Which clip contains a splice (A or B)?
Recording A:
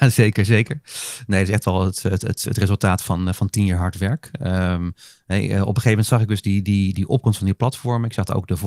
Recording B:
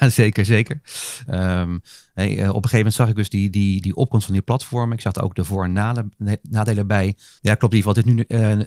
B